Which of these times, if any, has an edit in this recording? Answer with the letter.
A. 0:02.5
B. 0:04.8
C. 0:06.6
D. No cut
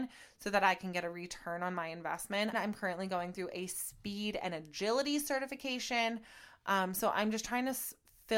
A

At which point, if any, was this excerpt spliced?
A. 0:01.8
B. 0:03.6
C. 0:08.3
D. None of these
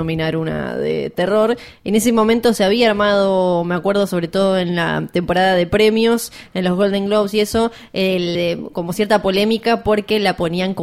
C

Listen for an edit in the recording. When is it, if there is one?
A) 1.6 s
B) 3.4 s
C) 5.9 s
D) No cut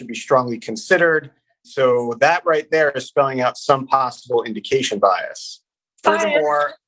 A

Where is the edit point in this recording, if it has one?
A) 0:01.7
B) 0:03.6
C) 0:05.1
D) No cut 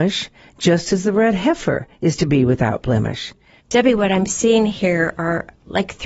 B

